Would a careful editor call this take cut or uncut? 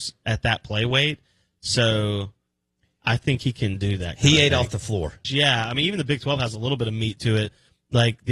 cut